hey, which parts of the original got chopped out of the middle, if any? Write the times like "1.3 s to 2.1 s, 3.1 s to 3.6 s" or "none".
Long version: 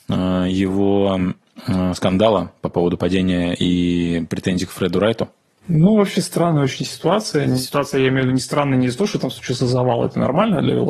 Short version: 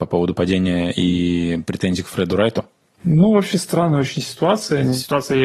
none

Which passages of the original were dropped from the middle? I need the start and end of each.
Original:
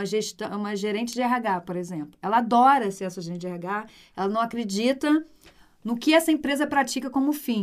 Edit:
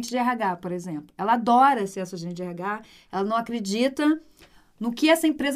none

